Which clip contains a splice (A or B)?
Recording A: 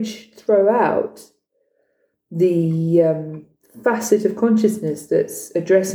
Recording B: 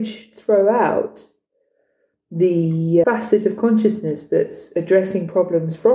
B